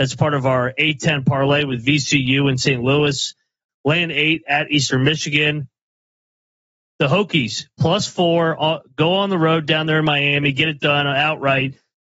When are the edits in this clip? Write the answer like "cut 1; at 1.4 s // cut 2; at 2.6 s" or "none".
cut 1; at 3.7 s